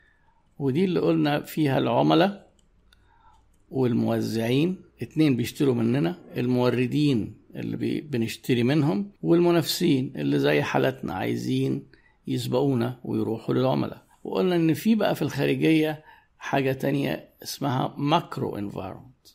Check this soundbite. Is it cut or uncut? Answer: cut